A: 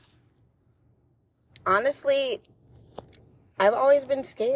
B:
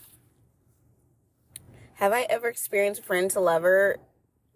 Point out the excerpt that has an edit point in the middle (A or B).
A